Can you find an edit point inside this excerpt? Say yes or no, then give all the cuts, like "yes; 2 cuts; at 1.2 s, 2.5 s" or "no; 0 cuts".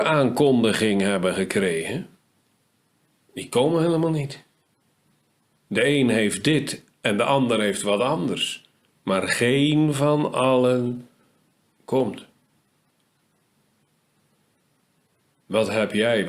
no; 0 cuts